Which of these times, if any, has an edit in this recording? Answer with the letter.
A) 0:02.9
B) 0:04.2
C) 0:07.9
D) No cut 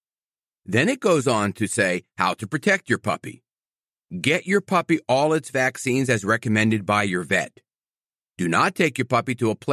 D